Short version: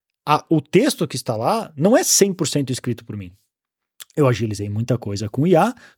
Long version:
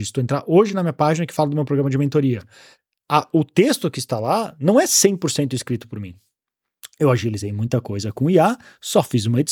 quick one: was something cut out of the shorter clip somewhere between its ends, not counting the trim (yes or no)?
no